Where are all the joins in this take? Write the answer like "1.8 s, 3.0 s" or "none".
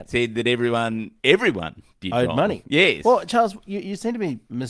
none